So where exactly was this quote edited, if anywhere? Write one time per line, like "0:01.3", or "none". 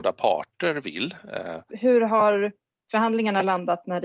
0:01.7